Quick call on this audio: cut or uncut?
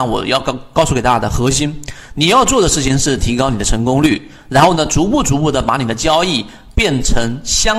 uncut